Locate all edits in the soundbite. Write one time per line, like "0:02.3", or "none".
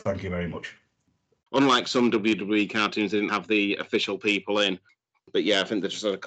0:01.5
0:03.3